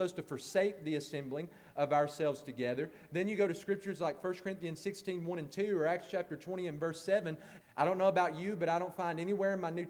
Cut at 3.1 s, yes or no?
no